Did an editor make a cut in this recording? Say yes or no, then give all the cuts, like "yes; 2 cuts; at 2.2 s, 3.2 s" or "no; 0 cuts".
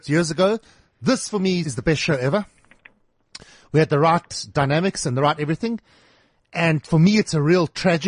yes; 1 cut; at 1.6 s